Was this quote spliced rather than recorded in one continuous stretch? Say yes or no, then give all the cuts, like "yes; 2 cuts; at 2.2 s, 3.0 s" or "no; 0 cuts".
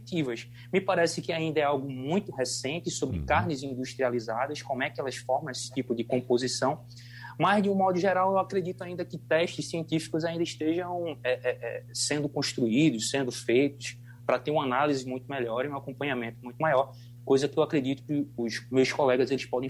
no; 0 cuts